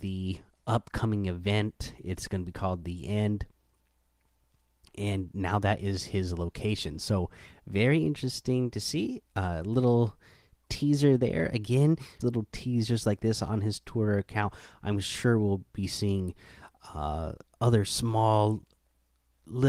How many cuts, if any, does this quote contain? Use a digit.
1